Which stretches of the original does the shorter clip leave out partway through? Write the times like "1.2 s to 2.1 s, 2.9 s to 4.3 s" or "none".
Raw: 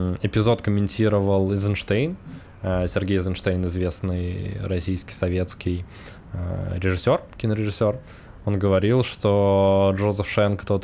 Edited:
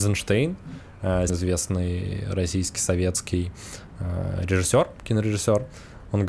2.9 s to 3.6 s